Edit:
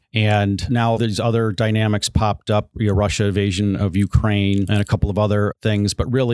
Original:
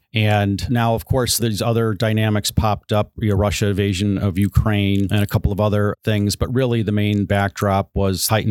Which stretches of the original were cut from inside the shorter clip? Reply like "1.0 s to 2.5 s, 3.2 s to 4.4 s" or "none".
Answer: 1.0 s to 1.4 s